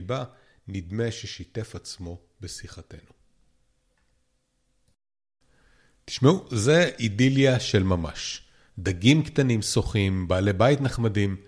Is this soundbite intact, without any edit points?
no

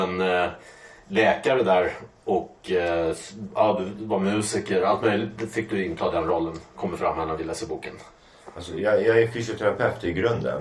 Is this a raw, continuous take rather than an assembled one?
yes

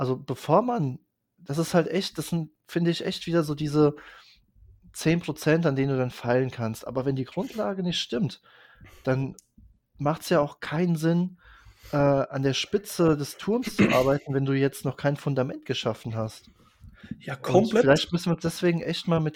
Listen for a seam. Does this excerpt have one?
no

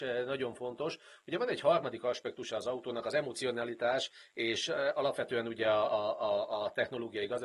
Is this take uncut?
yes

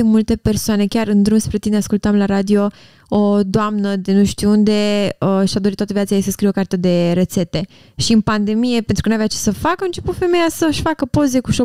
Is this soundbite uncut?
yes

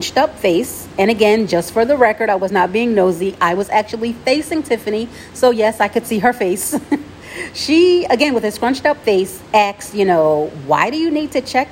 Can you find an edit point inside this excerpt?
no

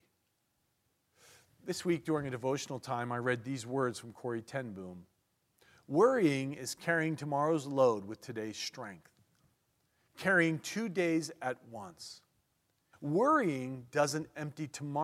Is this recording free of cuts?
no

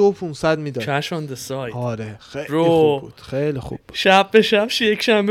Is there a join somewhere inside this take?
no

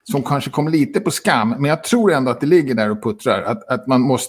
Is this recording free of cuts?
yes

